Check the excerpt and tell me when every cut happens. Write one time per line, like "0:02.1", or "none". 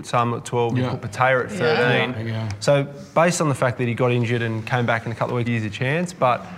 0:02.1
0:05.5